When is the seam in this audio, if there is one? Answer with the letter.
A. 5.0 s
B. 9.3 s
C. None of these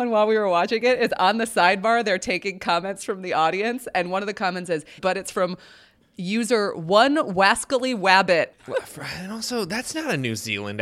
A